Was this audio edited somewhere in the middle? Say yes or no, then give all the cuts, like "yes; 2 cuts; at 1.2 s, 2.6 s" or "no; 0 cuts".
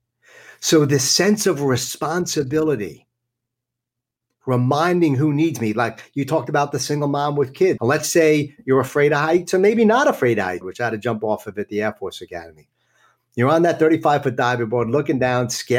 yes; 2 cuts; at 7.8 s, 10.6 s